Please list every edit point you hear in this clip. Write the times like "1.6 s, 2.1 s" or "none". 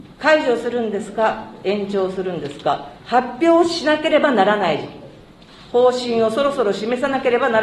3.0 s

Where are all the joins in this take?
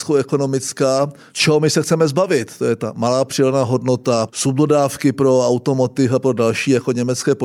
1.3 s, 4.3 s

